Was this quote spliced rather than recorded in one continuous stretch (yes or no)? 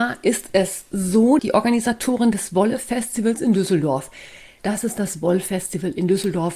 yes